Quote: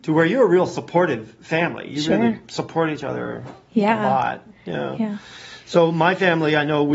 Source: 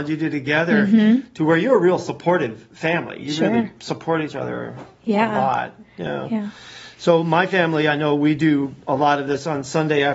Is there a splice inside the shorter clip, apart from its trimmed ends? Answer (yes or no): no